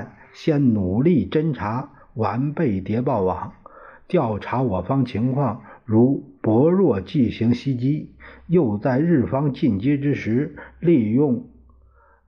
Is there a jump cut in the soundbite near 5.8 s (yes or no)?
no